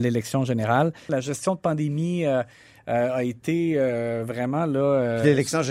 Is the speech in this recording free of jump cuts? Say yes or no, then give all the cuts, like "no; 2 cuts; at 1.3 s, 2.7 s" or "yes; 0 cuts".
no; 1 cut; at 1.1 s